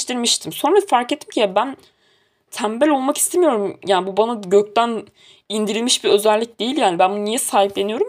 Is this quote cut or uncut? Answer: uncut